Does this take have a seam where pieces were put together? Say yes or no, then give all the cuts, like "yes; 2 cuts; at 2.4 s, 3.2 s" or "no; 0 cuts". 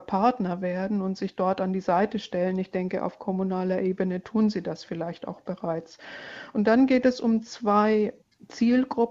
no; 0 cuts